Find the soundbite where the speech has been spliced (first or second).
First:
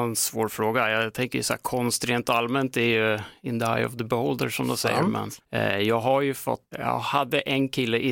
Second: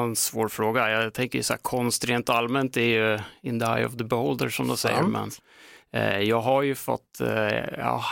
first